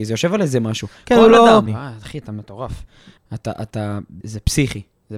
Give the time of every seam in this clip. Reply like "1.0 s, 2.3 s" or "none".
1.7 s, 3.2 s, 4.2 s